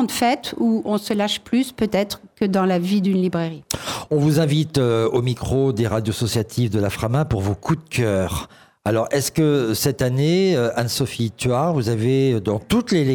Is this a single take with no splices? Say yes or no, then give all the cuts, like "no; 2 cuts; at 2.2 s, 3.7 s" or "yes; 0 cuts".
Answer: yes; 0 cuts